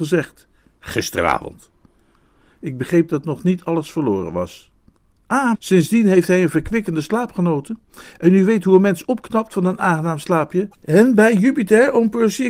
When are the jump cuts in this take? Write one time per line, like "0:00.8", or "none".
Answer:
0:05.5